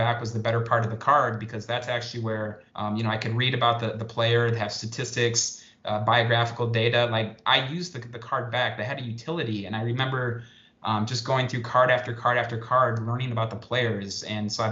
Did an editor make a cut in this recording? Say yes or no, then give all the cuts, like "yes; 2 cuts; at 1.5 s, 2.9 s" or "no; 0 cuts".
yes; 1 cut; at 2.7 s